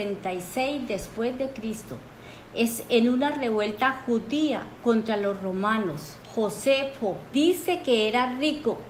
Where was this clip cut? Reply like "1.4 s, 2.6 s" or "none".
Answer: 6.2 s, 7.3 s